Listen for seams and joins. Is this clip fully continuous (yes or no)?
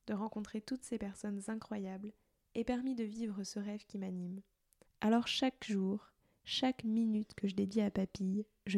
no